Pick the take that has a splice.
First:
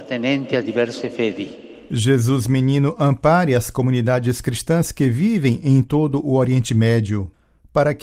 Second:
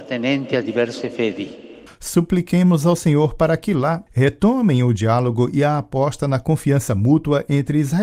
second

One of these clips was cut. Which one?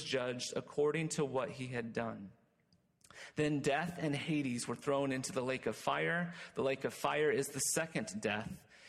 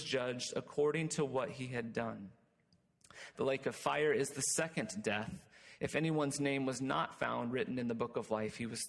second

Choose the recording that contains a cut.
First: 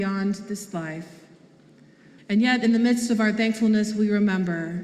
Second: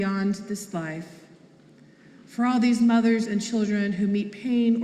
first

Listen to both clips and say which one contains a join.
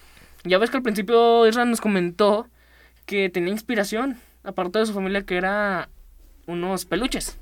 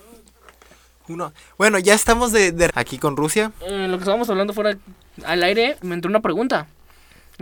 second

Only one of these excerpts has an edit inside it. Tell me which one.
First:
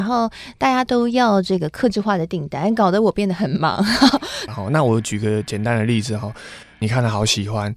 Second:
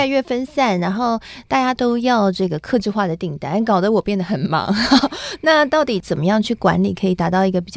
first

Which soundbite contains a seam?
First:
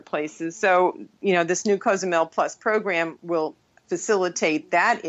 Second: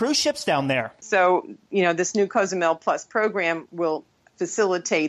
second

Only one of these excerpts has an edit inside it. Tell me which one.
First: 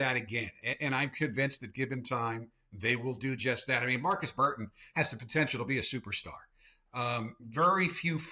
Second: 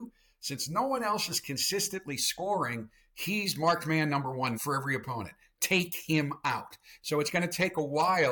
second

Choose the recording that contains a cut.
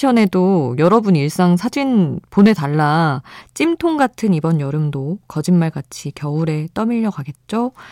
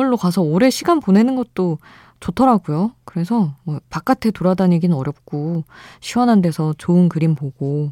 first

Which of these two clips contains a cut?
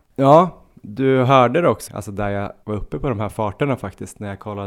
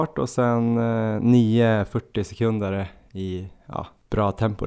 first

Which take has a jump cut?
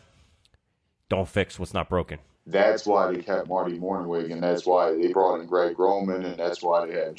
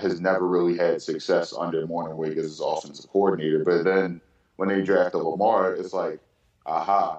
first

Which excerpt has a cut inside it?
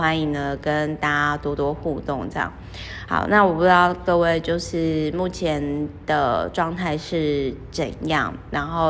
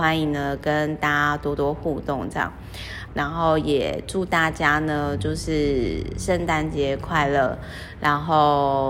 second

